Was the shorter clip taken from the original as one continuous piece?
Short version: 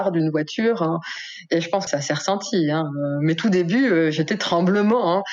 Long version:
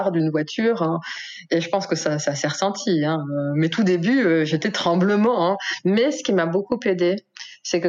no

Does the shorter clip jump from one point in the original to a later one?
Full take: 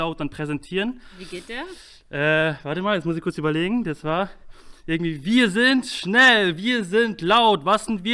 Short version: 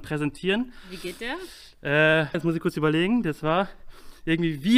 yes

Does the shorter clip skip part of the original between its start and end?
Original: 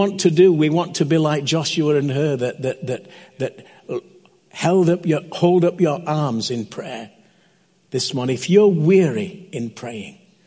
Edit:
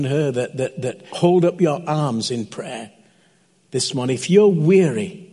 yes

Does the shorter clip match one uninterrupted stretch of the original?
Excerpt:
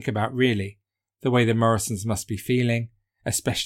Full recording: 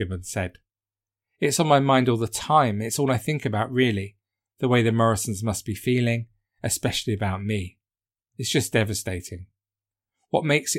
yes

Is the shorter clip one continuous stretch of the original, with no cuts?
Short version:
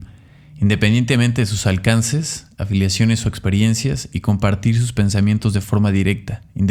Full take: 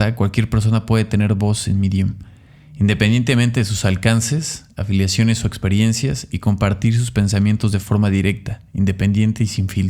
yes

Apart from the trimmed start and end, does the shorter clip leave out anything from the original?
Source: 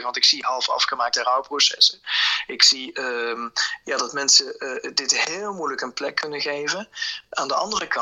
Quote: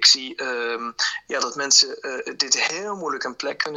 no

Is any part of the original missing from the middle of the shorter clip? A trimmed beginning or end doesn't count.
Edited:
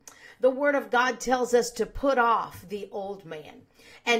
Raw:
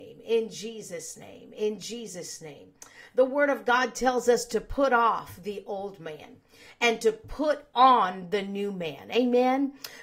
no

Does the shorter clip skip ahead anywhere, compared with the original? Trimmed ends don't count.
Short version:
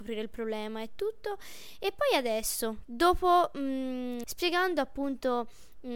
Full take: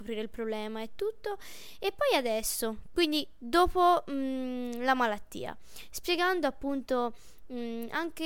yes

